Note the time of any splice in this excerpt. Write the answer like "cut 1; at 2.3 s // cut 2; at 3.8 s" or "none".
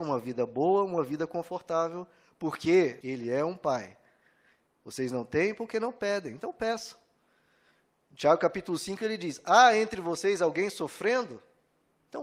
cut 1; at 3.0 s